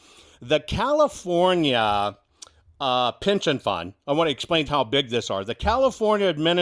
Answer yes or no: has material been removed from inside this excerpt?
yes